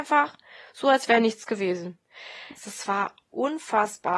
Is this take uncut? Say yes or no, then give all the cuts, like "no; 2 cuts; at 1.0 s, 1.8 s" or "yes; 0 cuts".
no; 1 cut; at 2.6 s